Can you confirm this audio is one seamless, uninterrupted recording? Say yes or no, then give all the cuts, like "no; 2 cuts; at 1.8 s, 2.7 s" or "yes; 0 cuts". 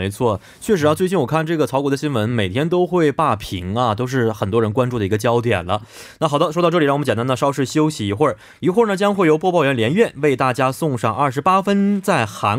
yes; 0 cuts